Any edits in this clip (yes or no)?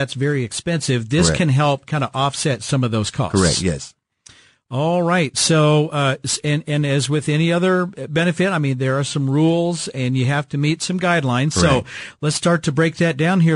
no